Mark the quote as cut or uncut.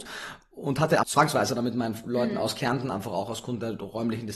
cut